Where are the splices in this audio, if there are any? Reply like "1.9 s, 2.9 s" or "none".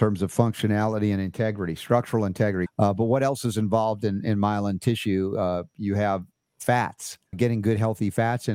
2.7 s, 7.3 s